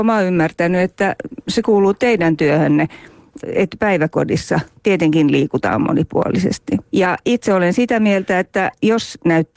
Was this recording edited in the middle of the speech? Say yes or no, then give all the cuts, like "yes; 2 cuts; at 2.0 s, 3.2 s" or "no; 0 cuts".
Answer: yes; 2 cuts; at 3.4 s, 6.9 s